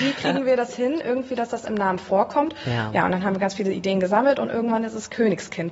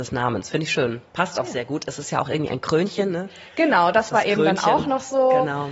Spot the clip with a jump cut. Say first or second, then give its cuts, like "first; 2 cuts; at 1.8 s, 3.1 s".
second; 1 cut; at 1.1 s